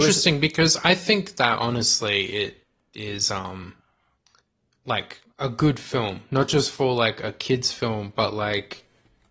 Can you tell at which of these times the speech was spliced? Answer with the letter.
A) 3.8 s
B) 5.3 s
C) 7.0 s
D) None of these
B